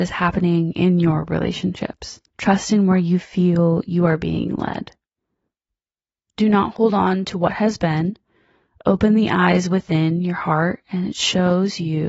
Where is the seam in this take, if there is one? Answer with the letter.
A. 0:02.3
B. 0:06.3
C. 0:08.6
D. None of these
A